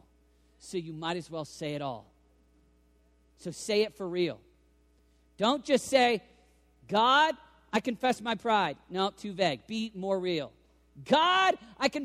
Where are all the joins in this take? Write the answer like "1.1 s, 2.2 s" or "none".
none